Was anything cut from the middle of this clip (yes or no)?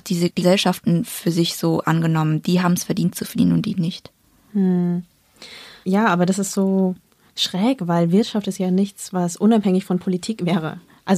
no